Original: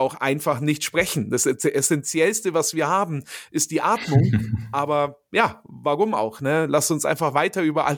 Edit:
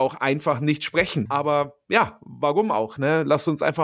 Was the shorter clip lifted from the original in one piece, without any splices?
no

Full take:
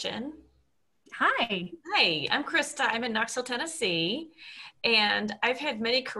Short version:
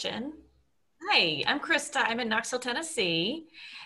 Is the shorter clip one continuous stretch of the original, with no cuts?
no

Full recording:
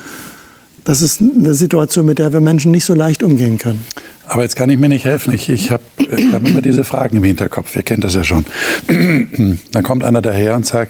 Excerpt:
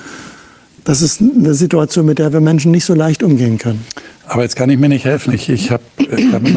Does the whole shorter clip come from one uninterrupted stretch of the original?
yes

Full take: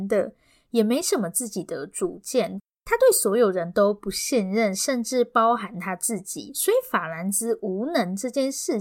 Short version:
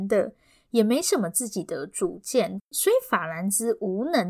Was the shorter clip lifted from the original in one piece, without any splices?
no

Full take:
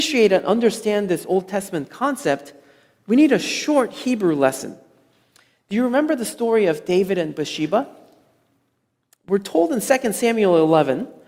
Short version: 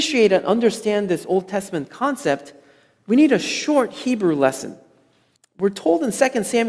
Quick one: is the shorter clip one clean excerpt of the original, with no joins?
no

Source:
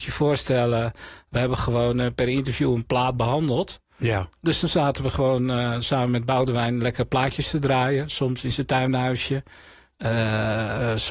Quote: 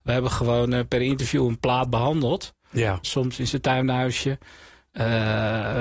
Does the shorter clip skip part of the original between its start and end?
yes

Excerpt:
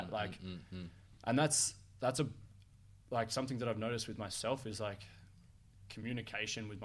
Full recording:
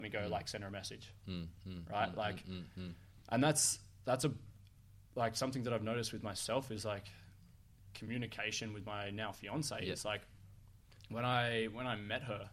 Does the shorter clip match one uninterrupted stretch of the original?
yes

